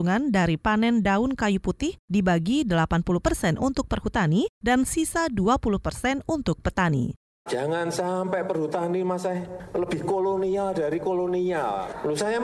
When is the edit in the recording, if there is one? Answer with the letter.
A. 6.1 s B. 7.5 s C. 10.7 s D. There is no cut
B